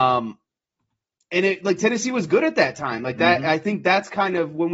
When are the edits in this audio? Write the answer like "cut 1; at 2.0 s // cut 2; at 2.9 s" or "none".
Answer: none